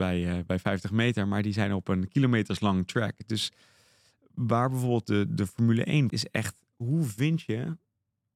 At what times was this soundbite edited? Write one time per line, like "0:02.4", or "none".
0:06.1